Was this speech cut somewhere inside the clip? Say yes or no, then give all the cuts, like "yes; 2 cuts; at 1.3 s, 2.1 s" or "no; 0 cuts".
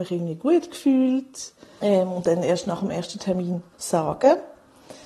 yes; 2 cuts; at 1.8 s, 3.7 s